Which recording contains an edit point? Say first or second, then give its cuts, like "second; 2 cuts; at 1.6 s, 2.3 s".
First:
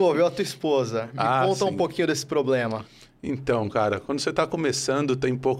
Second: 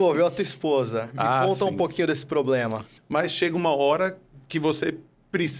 second; 1 cut; at 3.0 s